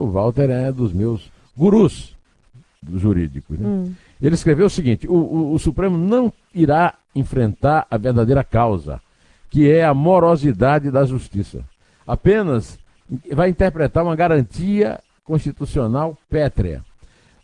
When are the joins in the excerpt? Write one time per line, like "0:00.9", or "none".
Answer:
0:13.2